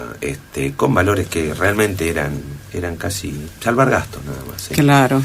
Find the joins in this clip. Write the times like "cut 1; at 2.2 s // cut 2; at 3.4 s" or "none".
none